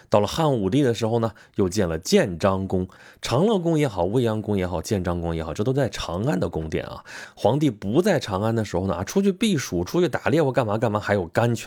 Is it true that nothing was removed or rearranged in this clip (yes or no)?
yes